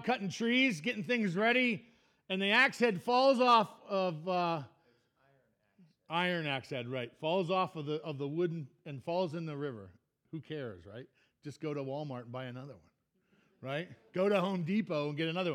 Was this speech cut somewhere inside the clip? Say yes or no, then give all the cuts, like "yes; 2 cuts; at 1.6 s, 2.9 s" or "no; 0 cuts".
no; 0 cuts